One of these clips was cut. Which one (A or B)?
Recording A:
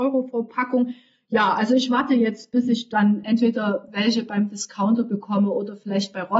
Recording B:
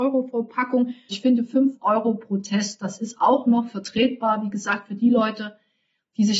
B